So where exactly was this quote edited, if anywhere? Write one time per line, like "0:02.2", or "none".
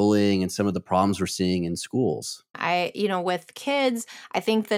0:02.5